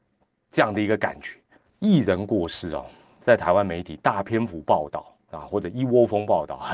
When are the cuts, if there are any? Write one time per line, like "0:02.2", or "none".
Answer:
0:01.6